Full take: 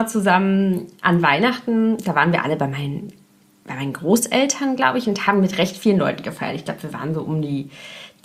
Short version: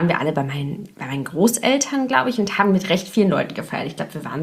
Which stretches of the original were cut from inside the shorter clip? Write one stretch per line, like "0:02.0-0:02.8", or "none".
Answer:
0:03.2-0:03.6